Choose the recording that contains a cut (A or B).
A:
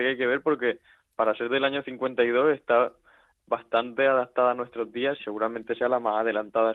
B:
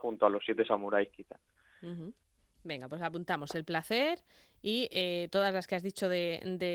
A